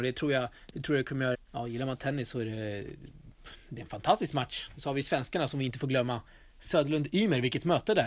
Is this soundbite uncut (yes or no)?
no